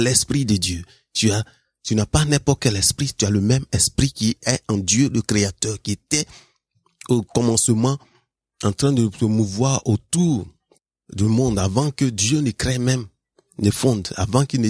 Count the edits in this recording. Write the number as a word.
zero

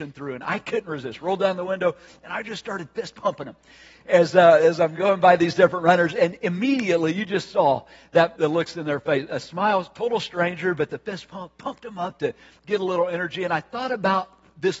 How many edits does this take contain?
one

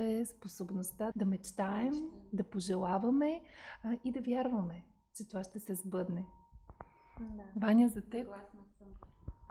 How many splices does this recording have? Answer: one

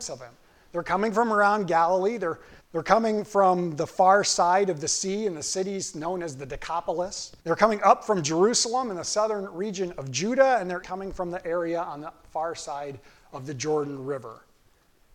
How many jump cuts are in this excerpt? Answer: three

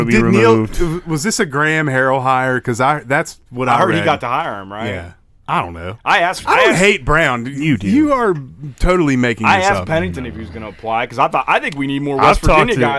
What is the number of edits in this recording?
zero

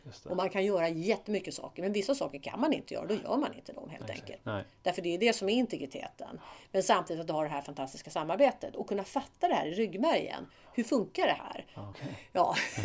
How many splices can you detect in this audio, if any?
two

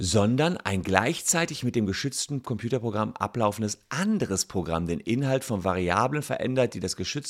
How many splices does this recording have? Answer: zero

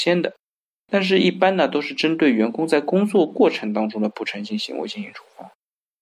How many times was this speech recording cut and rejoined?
zero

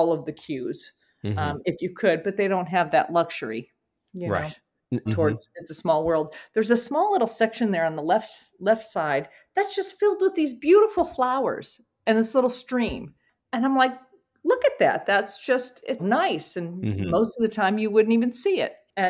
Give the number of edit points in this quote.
two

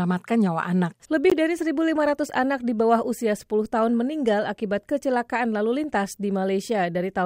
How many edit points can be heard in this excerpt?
zero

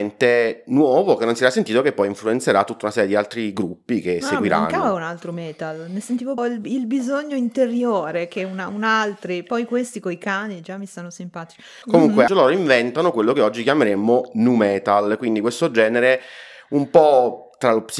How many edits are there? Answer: two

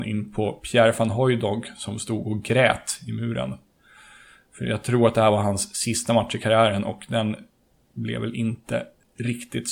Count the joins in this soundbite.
zero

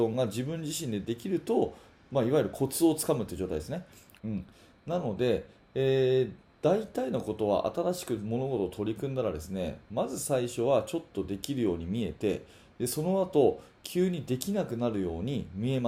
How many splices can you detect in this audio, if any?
one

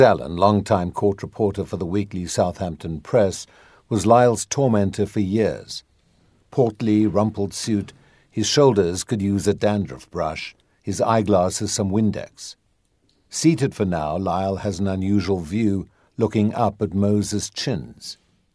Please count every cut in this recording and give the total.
zero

